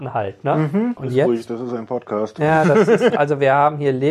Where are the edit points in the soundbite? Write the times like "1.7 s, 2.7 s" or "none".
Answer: 1.0 s, 3.1 s